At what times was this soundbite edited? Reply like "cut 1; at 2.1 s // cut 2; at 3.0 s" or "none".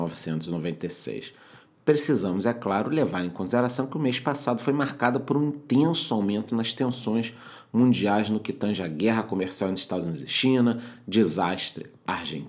none